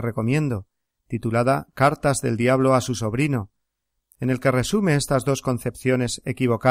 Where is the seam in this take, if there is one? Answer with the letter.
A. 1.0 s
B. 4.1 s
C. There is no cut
C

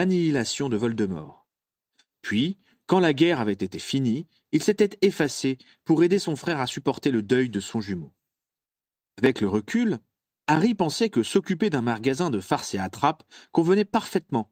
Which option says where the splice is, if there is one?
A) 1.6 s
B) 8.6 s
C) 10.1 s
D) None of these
D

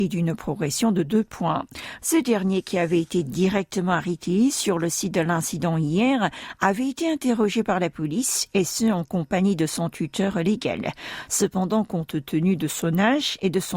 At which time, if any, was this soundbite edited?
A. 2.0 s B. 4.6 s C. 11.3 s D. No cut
A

